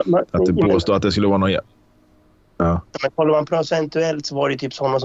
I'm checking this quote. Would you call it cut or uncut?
uncut